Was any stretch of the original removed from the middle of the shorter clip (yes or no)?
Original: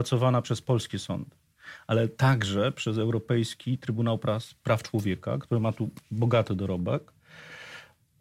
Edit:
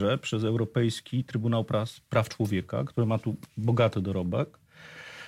no